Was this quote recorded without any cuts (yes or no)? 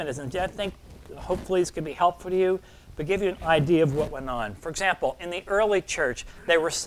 yes